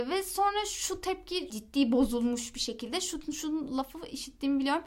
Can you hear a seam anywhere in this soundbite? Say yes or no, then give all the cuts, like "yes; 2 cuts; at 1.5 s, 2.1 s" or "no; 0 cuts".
yes; 1 cut; at 1.5 s